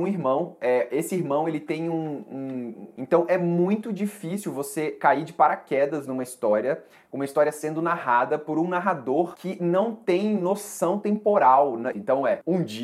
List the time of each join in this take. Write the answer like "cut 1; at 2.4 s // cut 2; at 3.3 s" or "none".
cut 1; at 3.0 s // cut 2; at 11.9 s